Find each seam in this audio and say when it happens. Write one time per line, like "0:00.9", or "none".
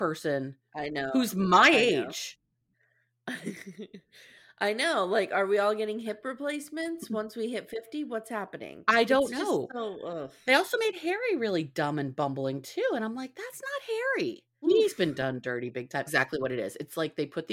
0:14.6
0:16.1